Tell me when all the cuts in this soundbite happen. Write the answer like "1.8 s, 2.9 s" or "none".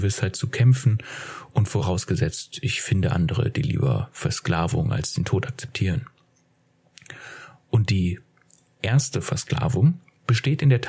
none